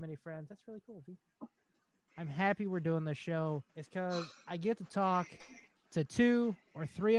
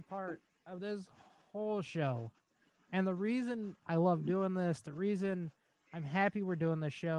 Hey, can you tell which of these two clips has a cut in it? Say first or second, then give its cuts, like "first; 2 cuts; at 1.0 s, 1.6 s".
first; 2 cuts; at 2.1 s, 3.7 s